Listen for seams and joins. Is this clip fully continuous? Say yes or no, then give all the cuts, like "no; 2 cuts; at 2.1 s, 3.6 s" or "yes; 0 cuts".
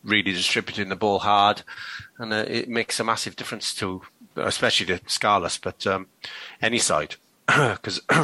no; 1 cut; at 4.3 s